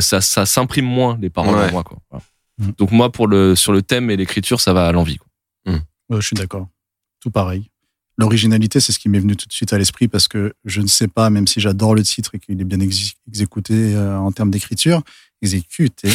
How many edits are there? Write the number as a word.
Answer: two